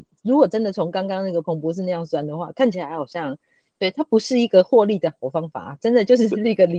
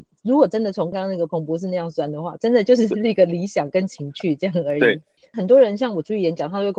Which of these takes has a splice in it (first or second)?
second